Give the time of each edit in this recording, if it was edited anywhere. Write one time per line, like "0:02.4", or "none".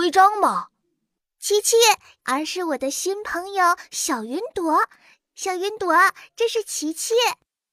0:02.2